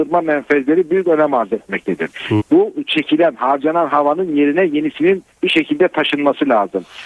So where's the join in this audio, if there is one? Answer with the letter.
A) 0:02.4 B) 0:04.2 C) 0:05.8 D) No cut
A